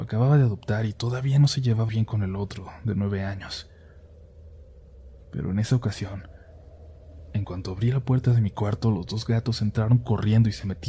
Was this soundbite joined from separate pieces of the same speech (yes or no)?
yes